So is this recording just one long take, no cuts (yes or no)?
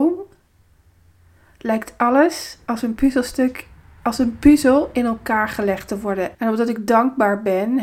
no